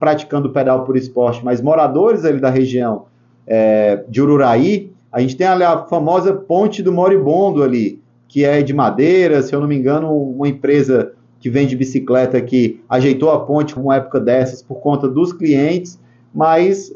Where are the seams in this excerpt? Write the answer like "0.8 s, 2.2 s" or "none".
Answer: 13.8 s